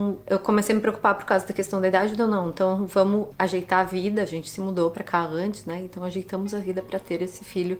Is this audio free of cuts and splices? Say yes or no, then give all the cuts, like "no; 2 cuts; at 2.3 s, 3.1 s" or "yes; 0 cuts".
yes; 0 cuts